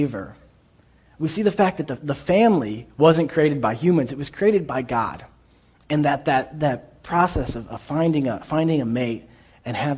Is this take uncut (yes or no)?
yes